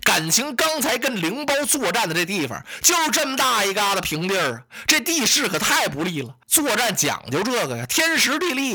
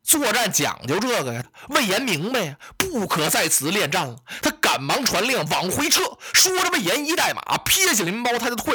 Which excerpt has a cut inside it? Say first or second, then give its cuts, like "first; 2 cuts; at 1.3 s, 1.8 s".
second; 1 cut; at 1.4 s